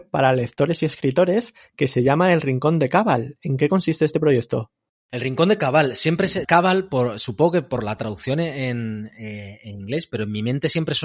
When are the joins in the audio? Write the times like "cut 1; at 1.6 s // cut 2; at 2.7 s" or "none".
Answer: cut 1; at 6.4 s